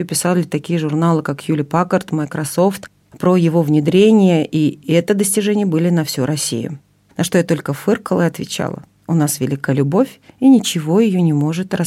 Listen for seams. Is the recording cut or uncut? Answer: cut